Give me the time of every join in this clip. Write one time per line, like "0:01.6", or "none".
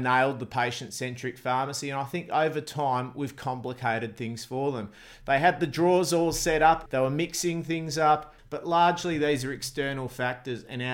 0:05.2
0:06.9
0:08.4